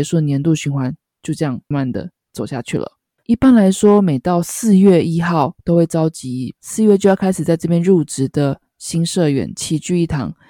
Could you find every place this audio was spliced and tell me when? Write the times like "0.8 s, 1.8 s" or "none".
1.7 s, 3.2 s